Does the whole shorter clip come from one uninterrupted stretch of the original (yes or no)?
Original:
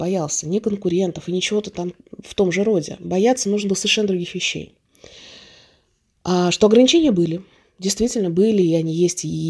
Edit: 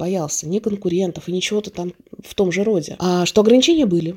no